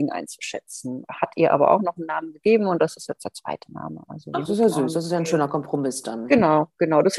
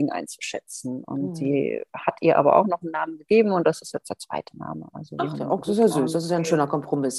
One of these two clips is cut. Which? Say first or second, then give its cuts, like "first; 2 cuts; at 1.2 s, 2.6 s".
first; 2 cuts; at 1.1 s, 4.4 s